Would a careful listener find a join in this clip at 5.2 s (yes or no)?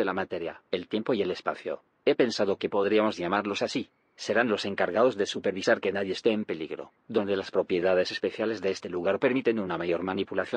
no